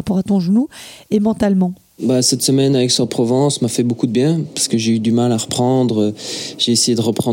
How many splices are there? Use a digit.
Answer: 0